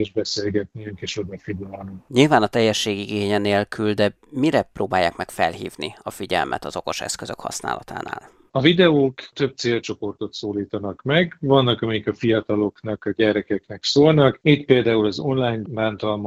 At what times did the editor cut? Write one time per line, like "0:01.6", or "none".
none

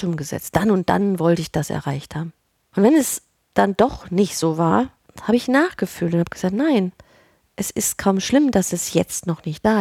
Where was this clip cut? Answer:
none

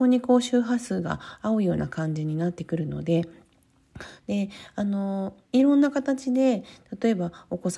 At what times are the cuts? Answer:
0:04.2
0:05.4

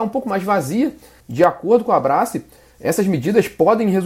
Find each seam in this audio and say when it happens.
0:01.2

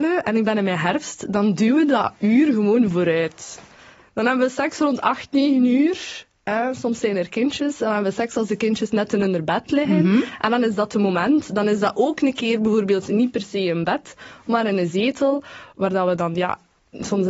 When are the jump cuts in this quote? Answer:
none

